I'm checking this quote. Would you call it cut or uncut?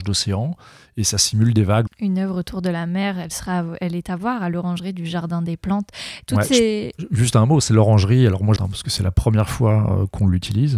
cut